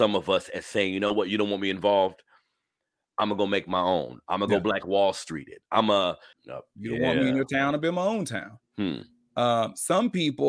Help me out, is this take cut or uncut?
cut